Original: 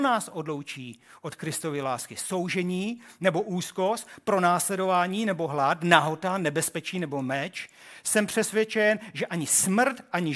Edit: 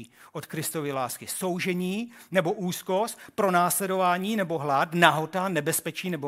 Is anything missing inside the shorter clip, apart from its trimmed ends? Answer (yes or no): no